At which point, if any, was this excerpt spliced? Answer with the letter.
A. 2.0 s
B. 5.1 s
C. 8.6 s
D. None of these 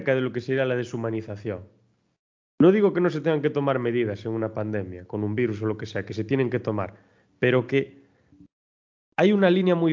D